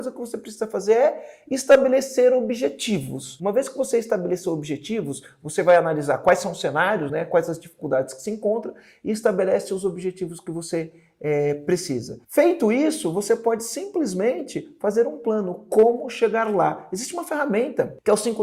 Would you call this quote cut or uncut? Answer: uncut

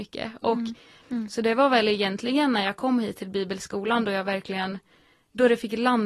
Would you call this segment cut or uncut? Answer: cut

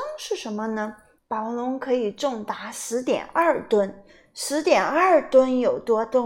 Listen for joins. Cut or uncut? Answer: cut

